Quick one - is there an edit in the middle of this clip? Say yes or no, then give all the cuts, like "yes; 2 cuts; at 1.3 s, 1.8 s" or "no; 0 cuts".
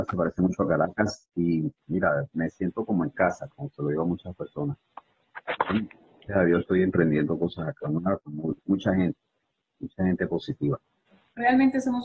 no; 0 cuts